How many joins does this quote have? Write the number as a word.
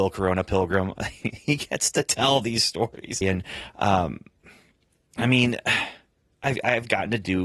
one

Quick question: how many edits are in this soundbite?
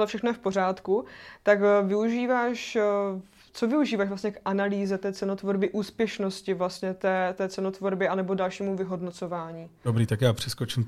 zero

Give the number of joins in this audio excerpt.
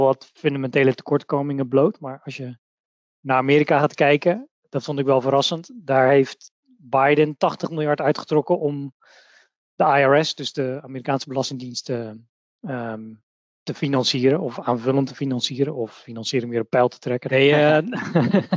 one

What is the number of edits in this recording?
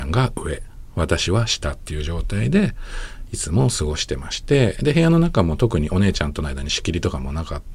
zero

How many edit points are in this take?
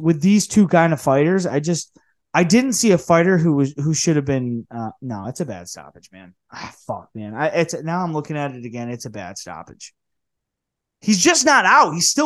zero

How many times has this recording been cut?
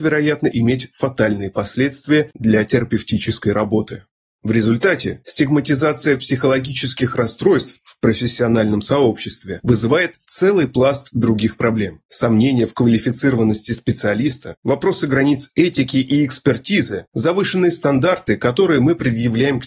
zero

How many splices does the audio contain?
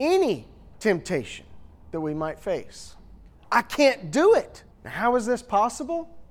two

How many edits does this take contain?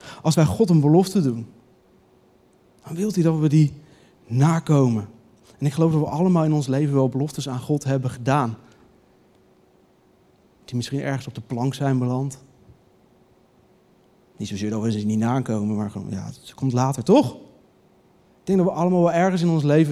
zero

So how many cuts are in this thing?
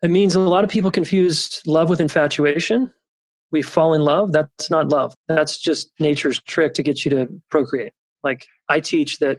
two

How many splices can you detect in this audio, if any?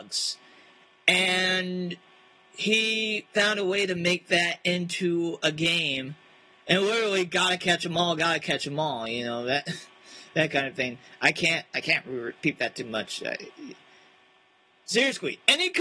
zero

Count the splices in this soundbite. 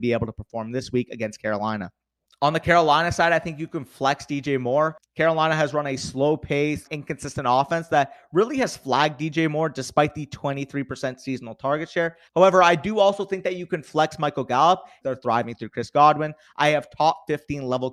three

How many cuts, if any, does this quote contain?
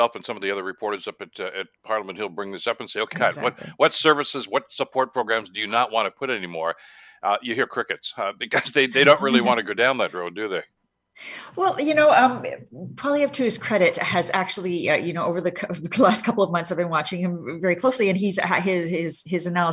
one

